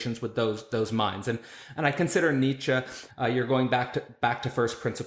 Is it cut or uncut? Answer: cut